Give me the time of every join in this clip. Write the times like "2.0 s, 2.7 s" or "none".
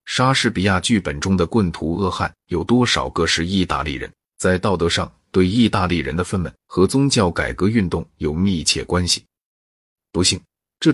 4.3 s, 6.6 s